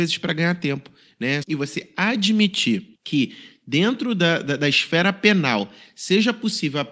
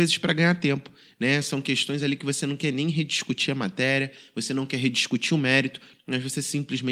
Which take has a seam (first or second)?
first